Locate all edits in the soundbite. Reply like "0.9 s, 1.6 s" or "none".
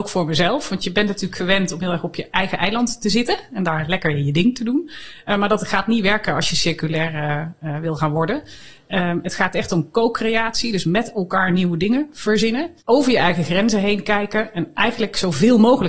12.8 s